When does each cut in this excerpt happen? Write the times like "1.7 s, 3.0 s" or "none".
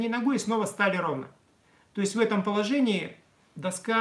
none